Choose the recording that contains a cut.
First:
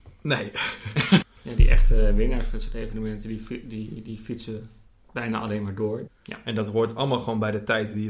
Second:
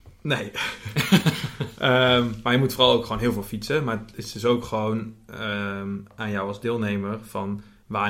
first; 2 cuts; at 1.2 s, 6.1 s

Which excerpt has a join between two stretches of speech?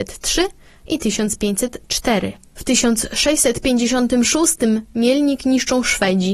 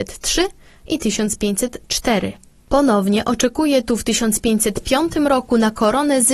first; 1 cut; at 2.5 s

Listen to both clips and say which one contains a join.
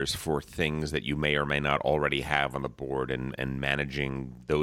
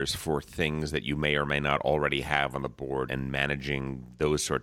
second; 1 cut; at 3.1 s

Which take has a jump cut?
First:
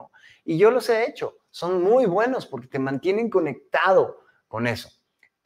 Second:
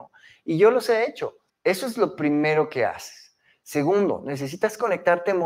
second; 1 cut; at 1.5 s

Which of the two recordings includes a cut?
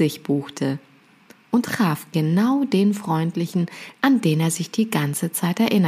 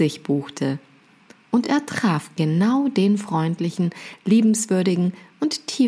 first; 2 cuts; at 1.6 s, 3.9 s

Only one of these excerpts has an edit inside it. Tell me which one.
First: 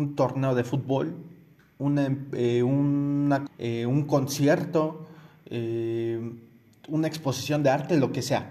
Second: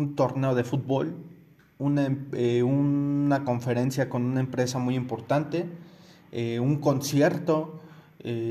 first; 1 cut; at 3.5 s

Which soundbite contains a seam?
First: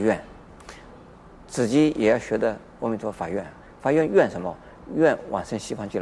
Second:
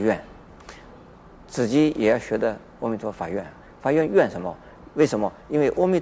second; 1 cut; at 4.9 s

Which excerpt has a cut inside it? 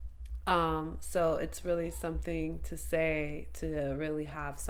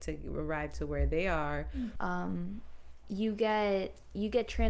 second; 1 cut; at 2.0 s

